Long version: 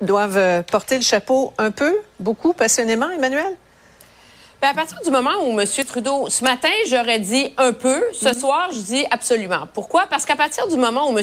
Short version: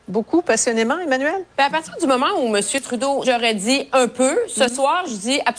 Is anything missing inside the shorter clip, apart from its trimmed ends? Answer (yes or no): yes